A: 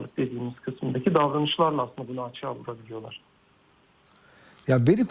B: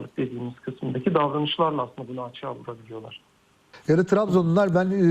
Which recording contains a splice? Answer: B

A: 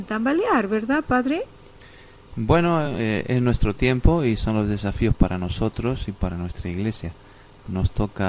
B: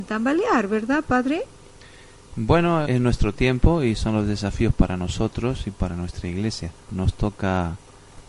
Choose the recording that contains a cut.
B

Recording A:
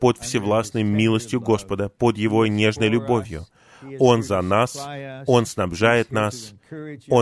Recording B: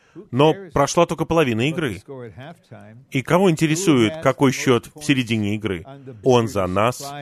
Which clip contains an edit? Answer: B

